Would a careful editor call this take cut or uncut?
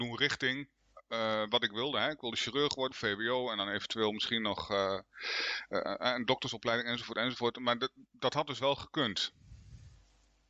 cut